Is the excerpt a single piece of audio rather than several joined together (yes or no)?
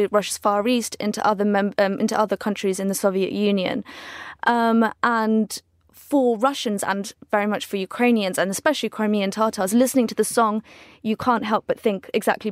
yes